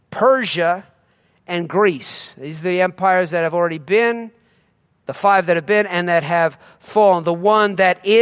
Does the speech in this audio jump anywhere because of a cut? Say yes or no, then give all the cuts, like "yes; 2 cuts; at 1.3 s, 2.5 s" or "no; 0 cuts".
no; 0 cuts